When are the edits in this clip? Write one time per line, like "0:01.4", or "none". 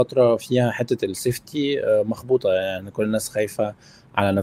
none